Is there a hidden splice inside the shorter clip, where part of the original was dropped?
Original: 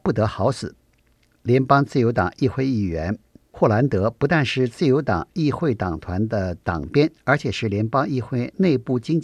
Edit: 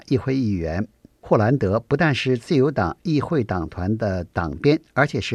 no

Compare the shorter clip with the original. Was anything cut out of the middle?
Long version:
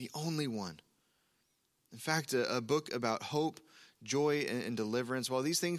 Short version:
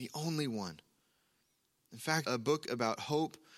yes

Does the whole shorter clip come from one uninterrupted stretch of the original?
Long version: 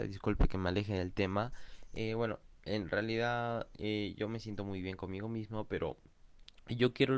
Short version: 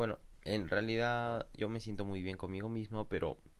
no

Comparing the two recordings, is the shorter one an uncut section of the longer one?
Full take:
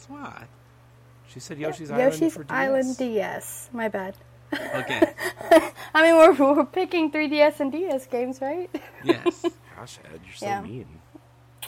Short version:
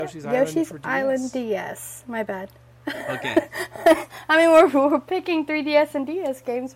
yes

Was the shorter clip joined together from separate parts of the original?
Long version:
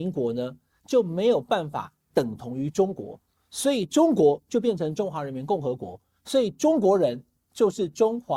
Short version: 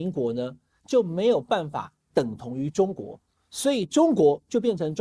no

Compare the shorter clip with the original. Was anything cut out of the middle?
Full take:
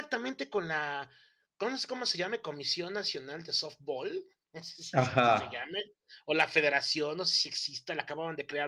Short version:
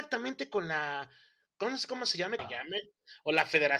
yes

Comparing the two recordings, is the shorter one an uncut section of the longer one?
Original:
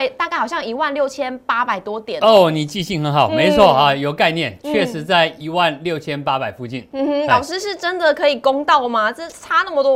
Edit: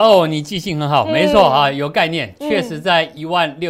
yes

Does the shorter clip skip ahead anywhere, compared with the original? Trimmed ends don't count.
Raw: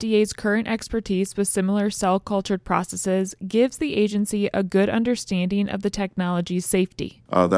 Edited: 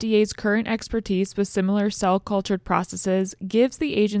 no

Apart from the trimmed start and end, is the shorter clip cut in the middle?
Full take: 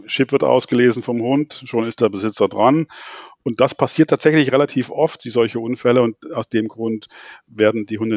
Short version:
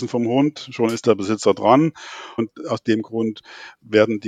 yes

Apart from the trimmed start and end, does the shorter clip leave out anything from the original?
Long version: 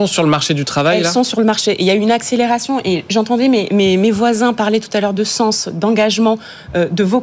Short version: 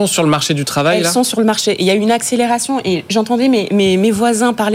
no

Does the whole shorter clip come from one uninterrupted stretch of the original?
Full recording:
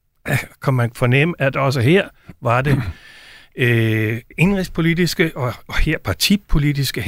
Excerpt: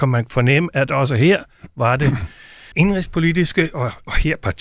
no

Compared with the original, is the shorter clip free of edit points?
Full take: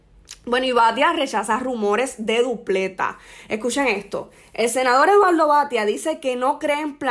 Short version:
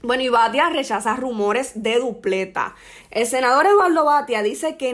no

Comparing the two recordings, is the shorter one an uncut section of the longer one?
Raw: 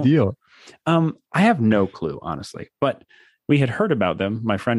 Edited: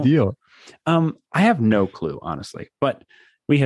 yes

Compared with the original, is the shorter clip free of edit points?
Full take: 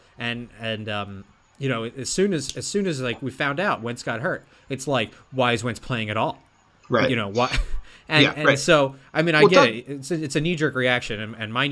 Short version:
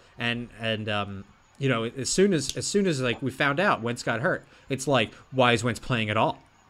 yes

